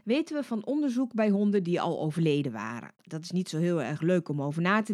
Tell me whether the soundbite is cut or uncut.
uncut